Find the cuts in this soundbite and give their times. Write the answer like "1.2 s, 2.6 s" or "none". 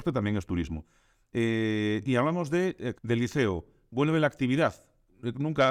2.9 s